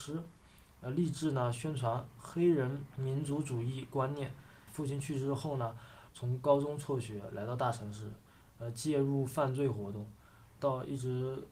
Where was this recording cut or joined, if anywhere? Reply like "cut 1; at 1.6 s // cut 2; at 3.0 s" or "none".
cut 1; at 4.7 s // cut 2; at 6.1 s // cut 3; at 10.6 s